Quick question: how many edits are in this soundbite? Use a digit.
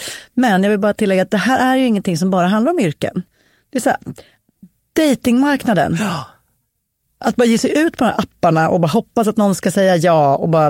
0